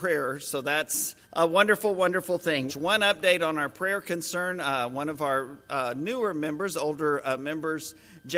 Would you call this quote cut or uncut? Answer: cut